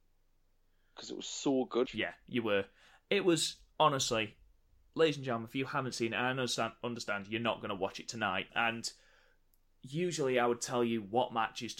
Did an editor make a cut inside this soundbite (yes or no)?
yes